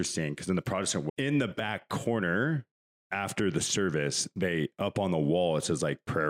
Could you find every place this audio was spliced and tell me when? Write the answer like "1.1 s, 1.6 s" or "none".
1.1 s